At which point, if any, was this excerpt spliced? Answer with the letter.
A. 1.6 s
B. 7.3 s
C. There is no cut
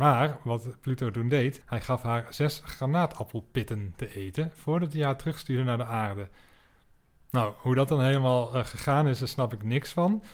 A